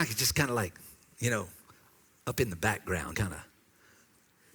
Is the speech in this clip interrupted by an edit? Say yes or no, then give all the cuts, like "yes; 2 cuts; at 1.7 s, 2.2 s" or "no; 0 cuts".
yes; 1 cut; at 3.1 s